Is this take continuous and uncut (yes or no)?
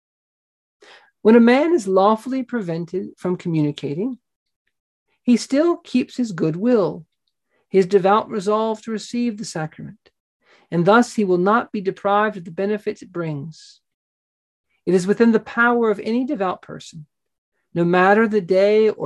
yes